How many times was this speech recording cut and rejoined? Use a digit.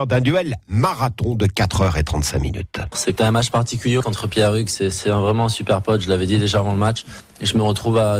0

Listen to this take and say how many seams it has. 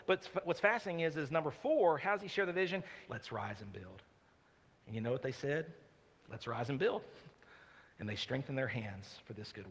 1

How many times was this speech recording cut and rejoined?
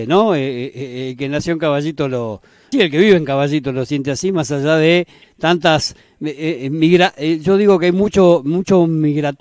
1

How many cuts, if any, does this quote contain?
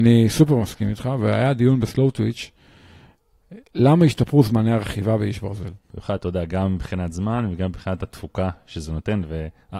1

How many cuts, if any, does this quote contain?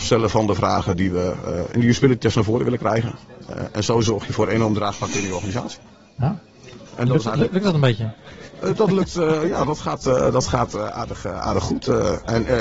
0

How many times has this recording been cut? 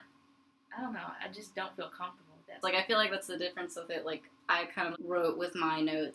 2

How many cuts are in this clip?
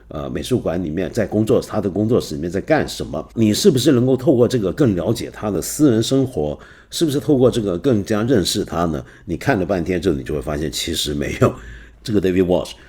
2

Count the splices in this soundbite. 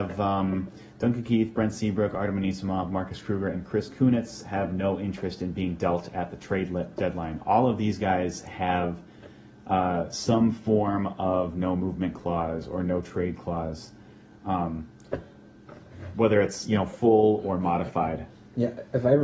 0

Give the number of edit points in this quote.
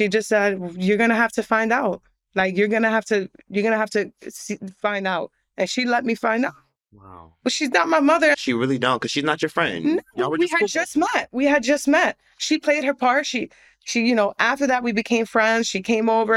1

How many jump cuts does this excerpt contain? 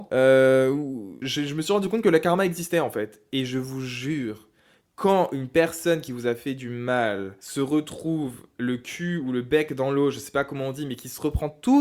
1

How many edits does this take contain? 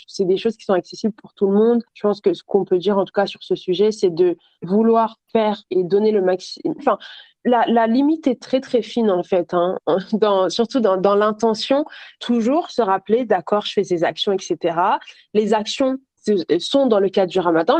2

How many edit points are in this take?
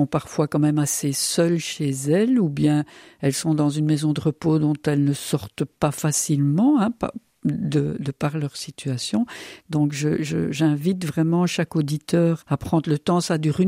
2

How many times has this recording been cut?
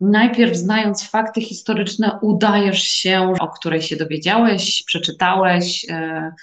1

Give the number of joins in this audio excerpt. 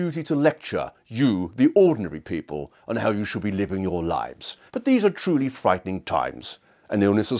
1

